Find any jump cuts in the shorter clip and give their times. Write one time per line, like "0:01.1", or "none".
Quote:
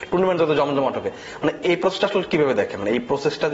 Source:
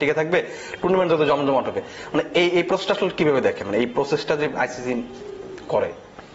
0:01.6